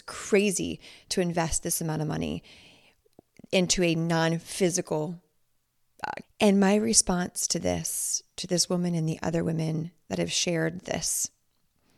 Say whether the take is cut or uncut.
cut